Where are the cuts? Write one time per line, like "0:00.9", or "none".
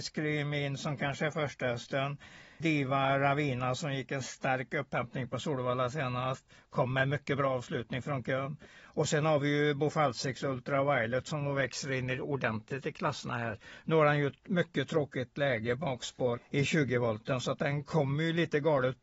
0:02.6
0:16.4